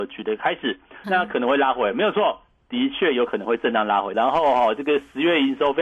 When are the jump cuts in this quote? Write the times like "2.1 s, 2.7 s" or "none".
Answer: 1.0 s, 4.1 s